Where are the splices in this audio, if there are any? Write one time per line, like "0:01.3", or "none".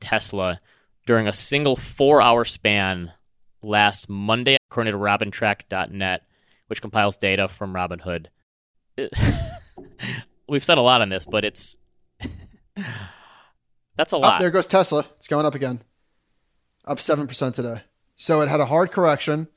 0:04.6